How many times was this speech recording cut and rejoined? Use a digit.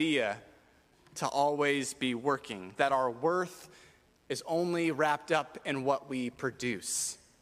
1